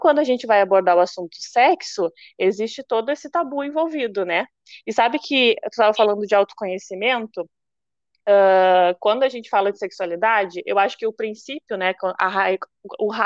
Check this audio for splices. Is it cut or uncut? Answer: uncut